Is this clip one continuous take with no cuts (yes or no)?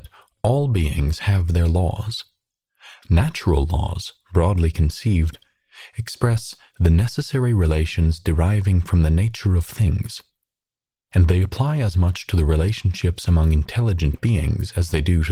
yes